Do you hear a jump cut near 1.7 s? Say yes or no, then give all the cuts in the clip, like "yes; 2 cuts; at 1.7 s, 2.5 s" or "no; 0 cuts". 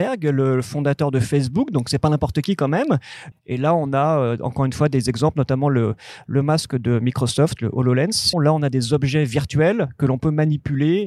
no; 2 cuts; at 3.3 s, 8.3 s